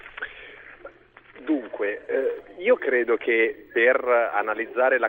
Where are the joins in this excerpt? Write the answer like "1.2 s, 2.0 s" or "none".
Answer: none